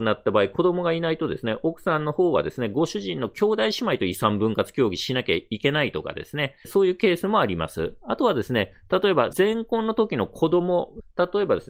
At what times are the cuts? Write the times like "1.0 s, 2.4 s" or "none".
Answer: 9.3 s